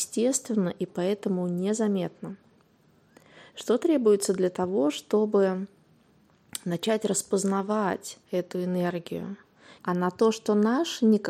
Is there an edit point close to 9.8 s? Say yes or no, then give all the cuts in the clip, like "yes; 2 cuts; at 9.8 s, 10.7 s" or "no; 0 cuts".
yes; 2 cuts; at 8.2 s, 9.8 s